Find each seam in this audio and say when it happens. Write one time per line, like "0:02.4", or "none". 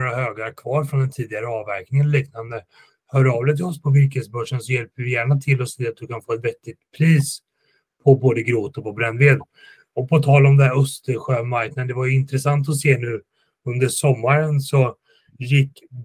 none